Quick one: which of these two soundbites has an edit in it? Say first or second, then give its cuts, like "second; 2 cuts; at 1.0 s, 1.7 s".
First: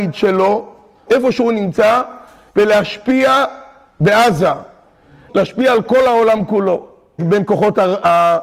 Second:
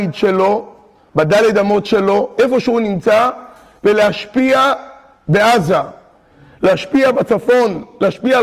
first; 3 cuts; at 1.1 s, 5.3 s, 7.2 s